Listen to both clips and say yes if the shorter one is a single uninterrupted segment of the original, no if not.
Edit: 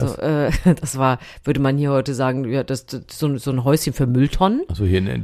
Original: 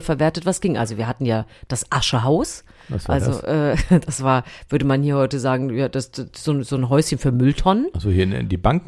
yes